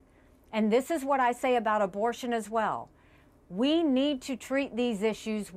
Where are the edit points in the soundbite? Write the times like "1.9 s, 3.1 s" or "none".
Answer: none